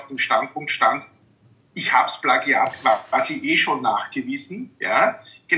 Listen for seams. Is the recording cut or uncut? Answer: uncut